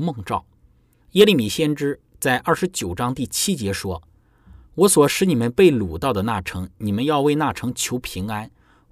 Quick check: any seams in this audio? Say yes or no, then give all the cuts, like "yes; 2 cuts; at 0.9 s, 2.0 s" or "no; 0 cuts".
yes; 1 cut; at 1.0 s